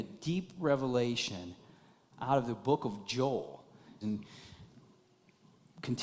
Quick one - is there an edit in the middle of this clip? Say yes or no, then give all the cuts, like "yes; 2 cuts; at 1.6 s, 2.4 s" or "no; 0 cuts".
yes; 1 cut; at 4.0 s